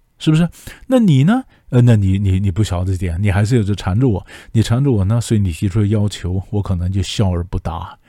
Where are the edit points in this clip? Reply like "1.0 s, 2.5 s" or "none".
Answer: none